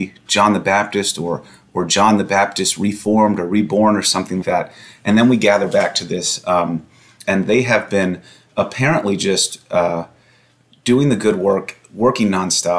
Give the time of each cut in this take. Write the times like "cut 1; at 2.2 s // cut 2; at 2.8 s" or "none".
cut 1; at 4.4 s // cut 2; at 7.2 s